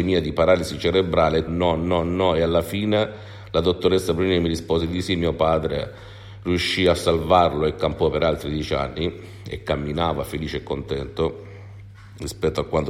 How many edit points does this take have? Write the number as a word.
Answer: one